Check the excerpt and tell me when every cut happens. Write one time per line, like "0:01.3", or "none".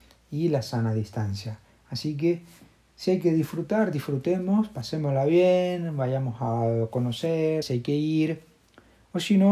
0:01.7
0:07.6